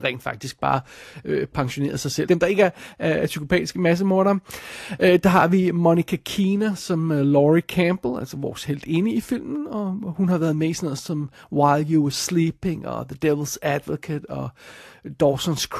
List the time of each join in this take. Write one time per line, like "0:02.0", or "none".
0:02.3